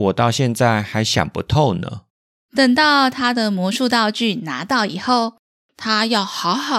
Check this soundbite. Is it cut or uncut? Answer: cut